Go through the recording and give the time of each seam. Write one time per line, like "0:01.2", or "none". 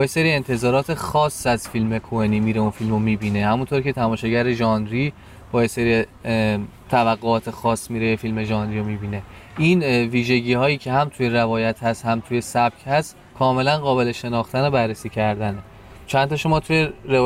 0:06.8

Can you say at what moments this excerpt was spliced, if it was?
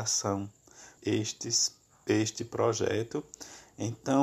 0:01.0

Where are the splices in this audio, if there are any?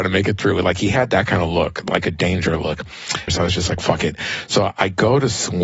0:03.3

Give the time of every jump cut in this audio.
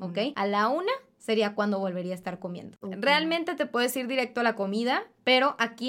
0:02.8

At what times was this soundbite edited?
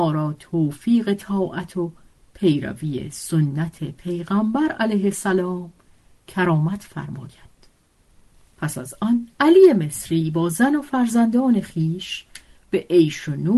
0:09.3

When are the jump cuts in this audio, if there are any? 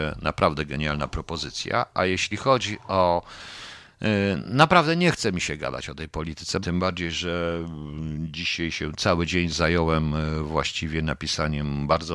0:06.6

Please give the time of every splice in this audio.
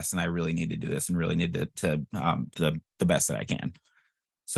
0:02.5

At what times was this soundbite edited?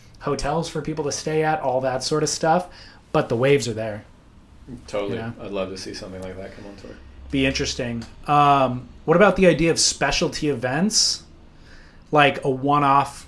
none

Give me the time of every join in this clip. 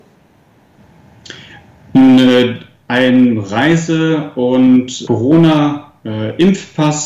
0:05.1

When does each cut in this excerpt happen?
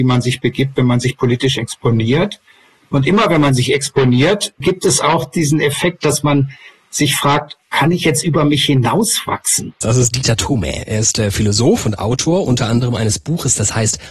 0:04.6
0:09.8

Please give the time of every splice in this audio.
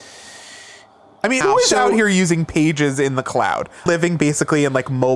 0:01.4
0:03.9

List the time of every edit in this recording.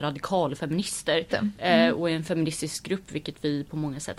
0:01.3

